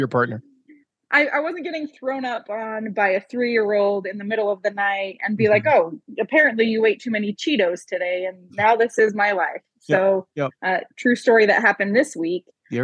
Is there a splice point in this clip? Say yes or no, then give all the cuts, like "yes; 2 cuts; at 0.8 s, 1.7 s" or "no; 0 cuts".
no; 0 cuts